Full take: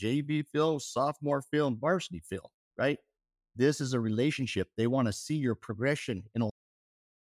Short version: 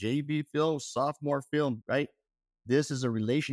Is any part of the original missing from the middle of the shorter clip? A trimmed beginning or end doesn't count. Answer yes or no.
yes